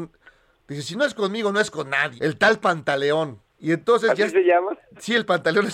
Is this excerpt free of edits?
no; 2 cuts; at 2.2 s, 3.5 s

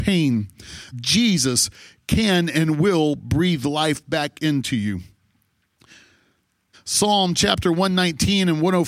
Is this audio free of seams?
no; 2 cuts; at 0.9 s, 6.7 s

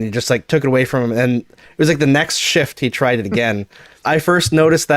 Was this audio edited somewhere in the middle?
yes; 1 cut; at 4.0 s

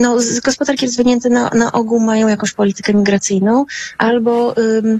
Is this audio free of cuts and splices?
yes; 0 cuts

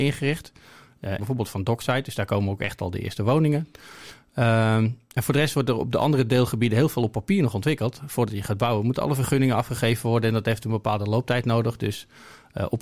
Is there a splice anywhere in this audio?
yes; 1 cut; at 1.2 s

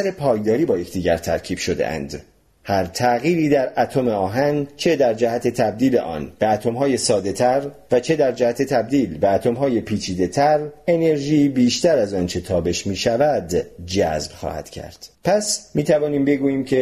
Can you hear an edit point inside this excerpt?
yes; 1 cut; at 15.1 s

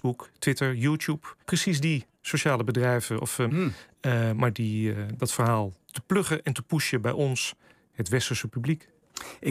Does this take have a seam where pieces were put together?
yes; 3 cuts; at 1.4 s, 3.5 s, 5.2 s

